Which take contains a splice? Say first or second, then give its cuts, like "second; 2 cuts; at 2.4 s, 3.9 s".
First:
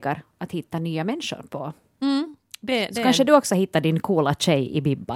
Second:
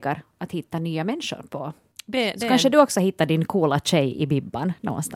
second; 1 cut; at 1.9 s